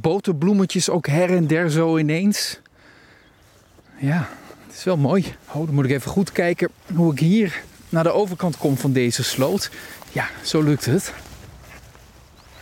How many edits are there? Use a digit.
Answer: 2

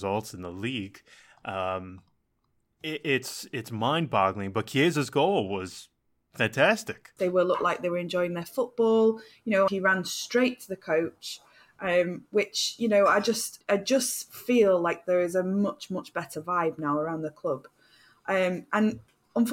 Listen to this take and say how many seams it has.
3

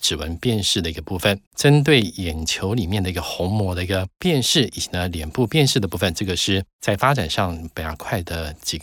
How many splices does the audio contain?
1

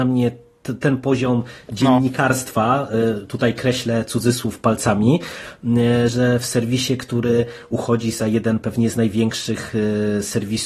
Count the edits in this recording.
1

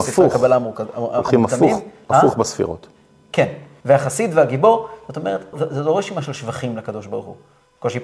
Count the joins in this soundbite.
2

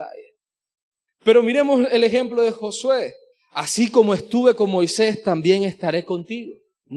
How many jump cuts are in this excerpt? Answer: 2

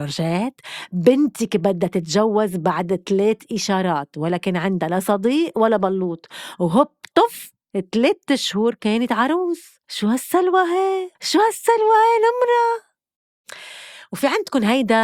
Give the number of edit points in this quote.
2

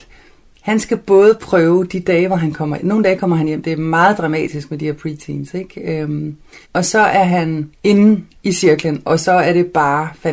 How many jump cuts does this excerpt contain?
2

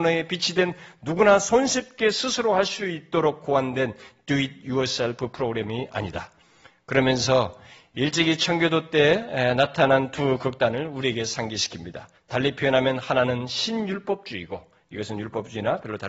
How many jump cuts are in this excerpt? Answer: 1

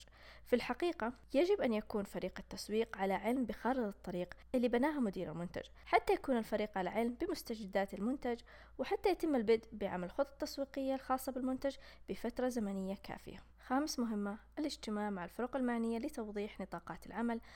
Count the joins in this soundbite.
1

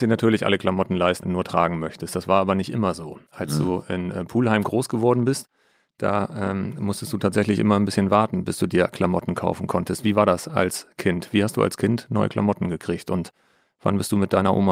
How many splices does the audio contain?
1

